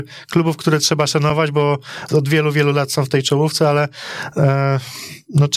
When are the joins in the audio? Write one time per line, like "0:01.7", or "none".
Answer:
0:02.1